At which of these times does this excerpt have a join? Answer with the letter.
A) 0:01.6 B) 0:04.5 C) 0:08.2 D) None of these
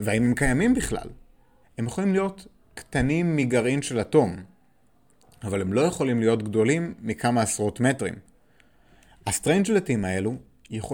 A